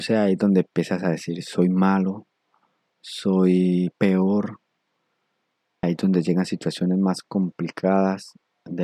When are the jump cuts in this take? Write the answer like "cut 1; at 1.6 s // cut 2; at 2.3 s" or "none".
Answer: cut 1; at 5.8 s